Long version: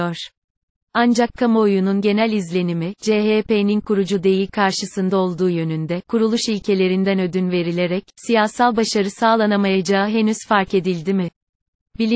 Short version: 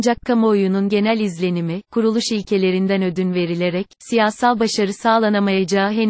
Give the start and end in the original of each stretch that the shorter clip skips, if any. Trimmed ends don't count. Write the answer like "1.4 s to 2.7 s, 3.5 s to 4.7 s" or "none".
3.0 s to 6.0 s